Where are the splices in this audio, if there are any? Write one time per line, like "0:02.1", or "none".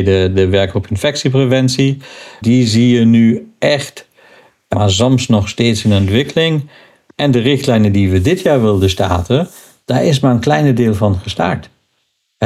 0:02.4
0:04.7

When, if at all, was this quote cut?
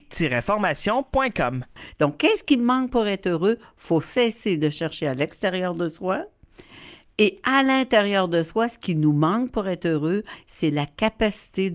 none

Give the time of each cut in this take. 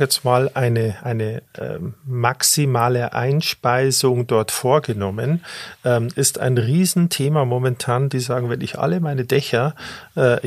0:01.0
0:08.1

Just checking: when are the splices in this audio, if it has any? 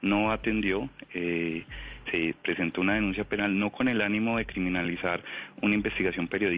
0:02.1

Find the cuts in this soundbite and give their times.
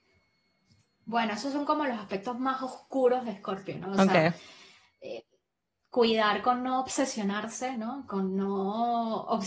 none

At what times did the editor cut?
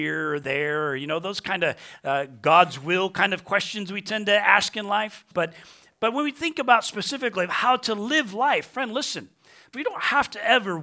0:05.3
0:09.7

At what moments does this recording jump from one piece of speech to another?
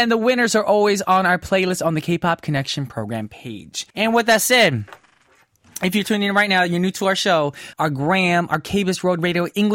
0:03.9
0:07.7

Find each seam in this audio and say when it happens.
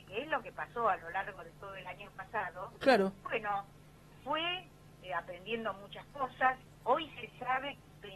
none

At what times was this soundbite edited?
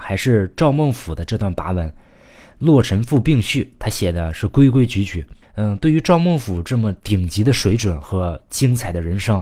0:05.4

